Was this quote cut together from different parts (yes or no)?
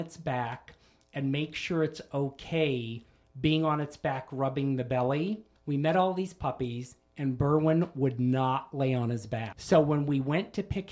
yes